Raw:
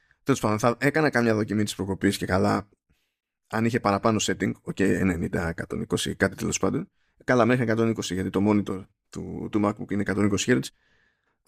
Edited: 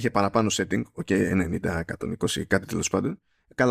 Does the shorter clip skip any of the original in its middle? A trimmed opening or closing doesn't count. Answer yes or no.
no